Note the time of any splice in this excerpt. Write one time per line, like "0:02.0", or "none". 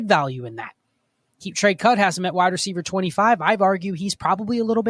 none